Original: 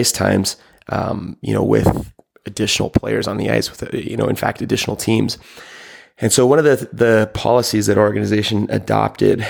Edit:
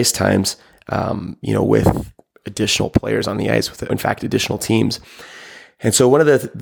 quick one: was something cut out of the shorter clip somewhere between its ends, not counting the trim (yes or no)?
yes